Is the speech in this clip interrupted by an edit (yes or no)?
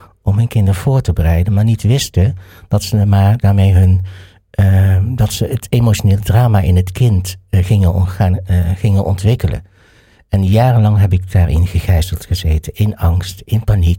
no